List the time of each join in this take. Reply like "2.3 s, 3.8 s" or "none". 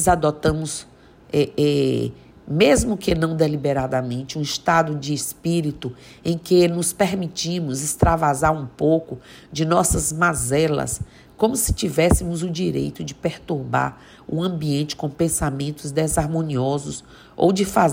none